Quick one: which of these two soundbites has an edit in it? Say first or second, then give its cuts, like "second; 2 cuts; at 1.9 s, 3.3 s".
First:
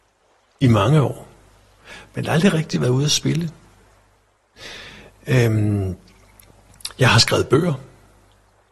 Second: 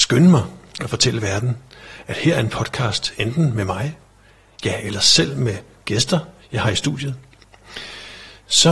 second; 1 cut; at 6.4 s